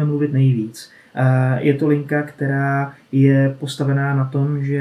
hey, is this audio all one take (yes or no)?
yes